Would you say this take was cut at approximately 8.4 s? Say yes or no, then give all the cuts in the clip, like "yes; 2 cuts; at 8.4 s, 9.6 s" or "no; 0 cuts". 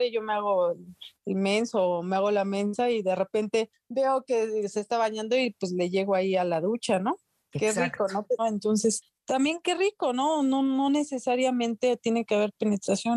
yes; 1 cut; at 8.4 s